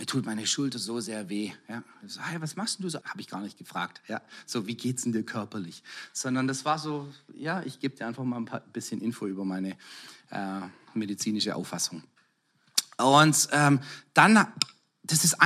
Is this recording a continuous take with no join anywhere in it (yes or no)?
no